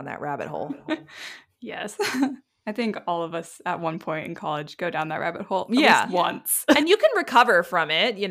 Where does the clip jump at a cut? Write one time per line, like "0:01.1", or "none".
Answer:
none